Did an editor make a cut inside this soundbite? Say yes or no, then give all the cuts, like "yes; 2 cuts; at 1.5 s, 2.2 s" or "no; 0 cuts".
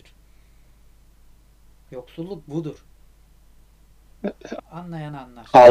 yes; 1 cut; at 4.6 s